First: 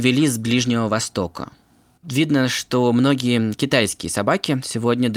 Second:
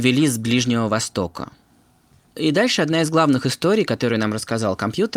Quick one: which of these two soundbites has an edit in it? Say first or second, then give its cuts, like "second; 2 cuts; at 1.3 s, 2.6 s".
first; 1 cut; at 2.0 s